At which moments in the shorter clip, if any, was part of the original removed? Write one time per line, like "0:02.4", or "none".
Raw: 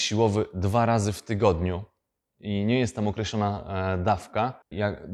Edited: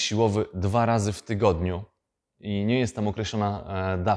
none